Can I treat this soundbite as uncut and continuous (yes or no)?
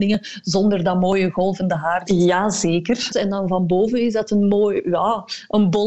no